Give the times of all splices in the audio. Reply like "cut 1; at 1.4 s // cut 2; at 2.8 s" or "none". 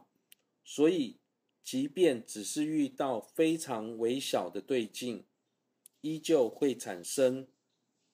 none